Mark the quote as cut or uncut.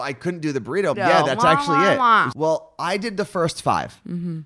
cut